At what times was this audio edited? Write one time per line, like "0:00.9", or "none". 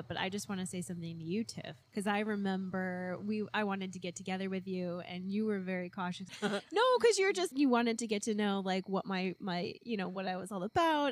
0:01.8
0:06.3
0:07.5